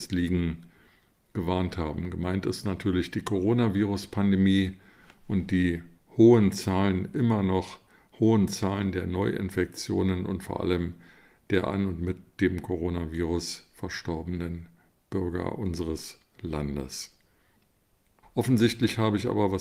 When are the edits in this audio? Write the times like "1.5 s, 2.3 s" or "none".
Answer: 18.2 s